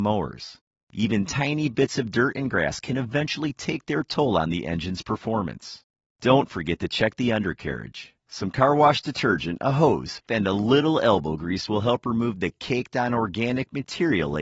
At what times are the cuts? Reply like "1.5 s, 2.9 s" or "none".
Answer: 10.3 s